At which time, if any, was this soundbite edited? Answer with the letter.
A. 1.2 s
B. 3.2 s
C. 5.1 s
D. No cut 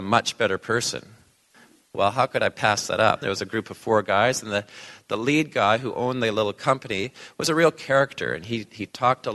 B